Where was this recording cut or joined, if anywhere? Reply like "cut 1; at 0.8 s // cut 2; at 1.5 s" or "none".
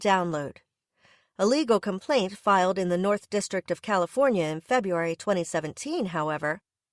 cut 1; at 1.2 s